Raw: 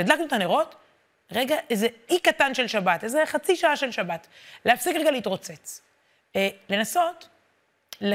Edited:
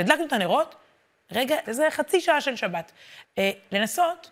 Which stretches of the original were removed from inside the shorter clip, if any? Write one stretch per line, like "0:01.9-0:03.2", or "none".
0:01.6-0:03.0
0:04.6-0:06.2